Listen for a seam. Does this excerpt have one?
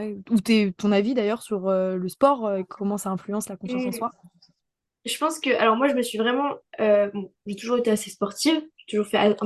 no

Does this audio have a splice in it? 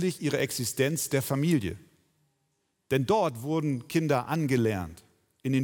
no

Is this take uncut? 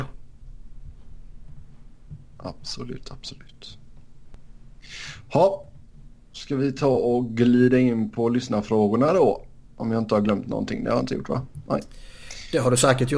yes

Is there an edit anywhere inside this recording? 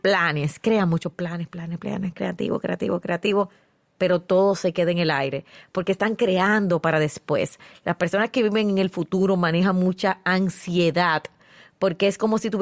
yes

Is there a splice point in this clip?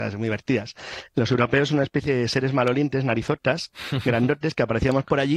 no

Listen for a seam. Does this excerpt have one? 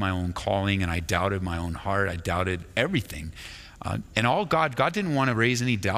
no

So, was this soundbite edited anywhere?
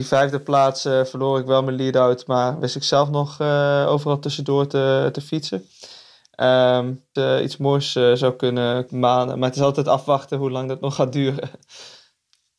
yes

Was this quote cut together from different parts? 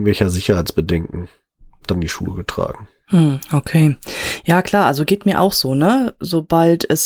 no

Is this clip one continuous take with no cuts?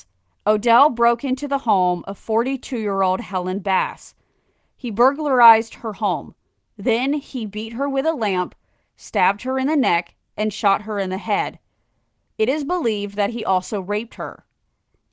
yes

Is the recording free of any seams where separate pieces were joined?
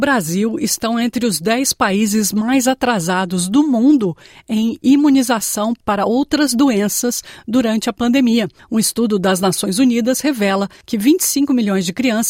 yes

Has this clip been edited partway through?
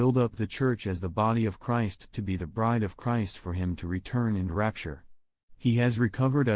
yes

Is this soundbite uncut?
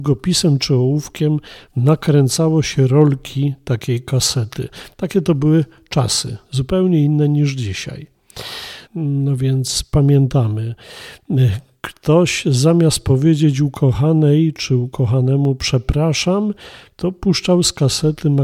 no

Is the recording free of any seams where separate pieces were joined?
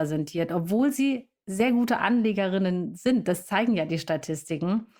yes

